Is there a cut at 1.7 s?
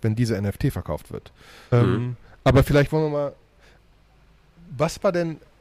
yes; 1 cut; at 1.7 s

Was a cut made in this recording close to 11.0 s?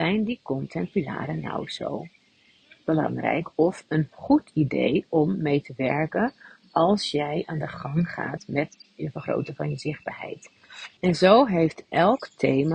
yes; 1 cut; at 11.0 s

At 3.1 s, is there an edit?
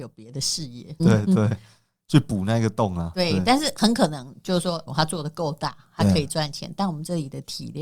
no; 2 cuts; at 1.0 s, 4.9 s

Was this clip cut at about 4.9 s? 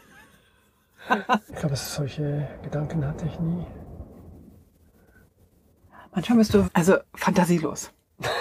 no; 2 cuts; at 1.5 s, 6.6 s

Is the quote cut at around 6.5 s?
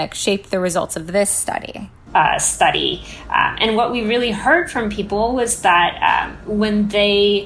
no; 1 cut; at 2.1 s

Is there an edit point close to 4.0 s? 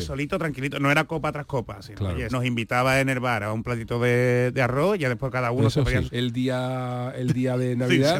no; 2 cuts; at 2.3 s, 6.1 s

